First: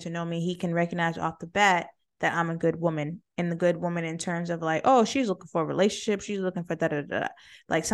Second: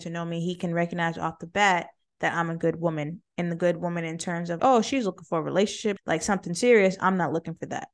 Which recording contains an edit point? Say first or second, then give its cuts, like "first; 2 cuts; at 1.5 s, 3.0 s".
second; 2 cuts; at 4.6 s, 6.0 s